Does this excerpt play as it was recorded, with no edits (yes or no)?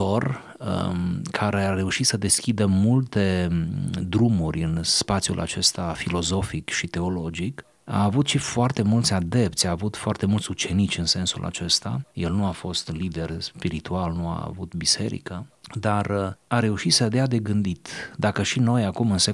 yes